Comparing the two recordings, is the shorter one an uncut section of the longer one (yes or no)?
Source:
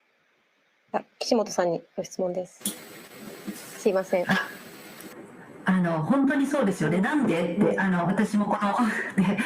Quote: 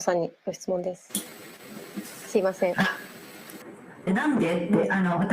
no